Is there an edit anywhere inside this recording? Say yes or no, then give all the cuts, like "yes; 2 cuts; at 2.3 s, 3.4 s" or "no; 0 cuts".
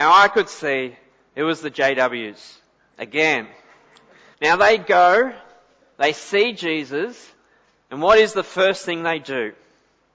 yes; 1 cut; at 4.3 s